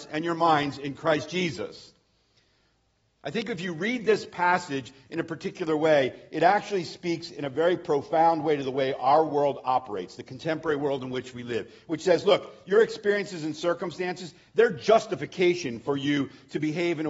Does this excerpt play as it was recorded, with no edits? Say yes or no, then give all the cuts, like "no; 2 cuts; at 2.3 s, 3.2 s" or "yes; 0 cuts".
yes; 0 cuts